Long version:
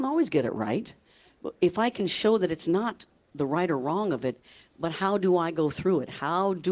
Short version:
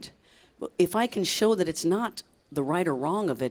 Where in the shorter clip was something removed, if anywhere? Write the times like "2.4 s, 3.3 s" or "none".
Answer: none